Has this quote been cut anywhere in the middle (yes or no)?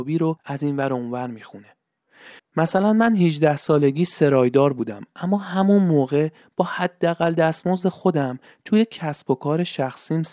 yes